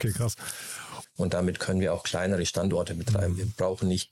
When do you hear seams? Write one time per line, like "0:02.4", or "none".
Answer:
0:01.0